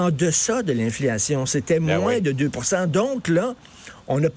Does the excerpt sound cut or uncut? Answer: uncut